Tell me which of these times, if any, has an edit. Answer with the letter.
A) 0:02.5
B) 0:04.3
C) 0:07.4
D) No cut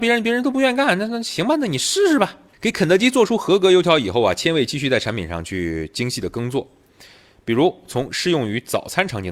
A